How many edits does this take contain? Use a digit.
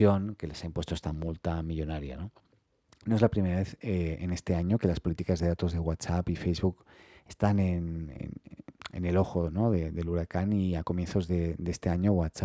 0